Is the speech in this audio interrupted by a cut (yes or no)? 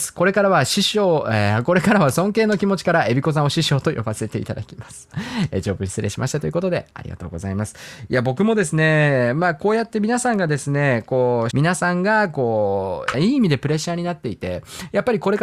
yes